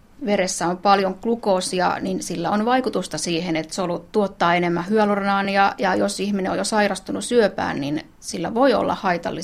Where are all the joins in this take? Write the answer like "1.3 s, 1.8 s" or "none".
none

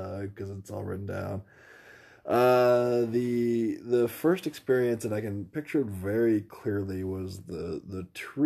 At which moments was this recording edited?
none

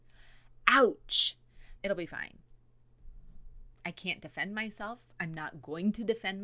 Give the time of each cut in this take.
1.8 s, 3.7 s

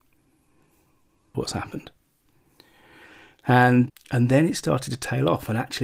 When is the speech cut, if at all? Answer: 1.3 s, 3.9 s

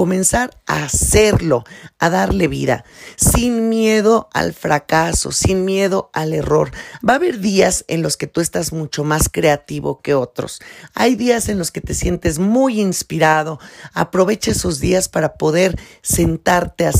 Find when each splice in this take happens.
7.0 s

